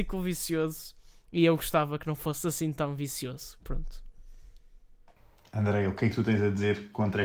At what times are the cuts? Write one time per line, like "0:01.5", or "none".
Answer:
none